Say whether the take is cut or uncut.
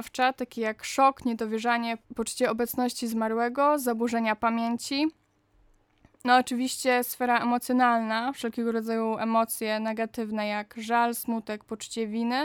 uncut